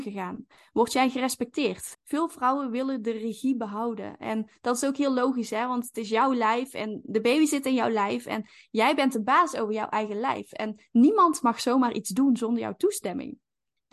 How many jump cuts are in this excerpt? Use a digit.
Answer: 1